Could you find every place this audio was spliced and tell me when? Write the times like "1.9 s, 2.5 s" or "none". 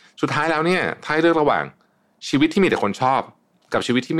none